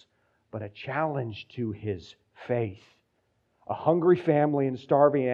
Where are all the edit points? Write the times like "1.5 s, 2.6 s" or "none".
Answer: none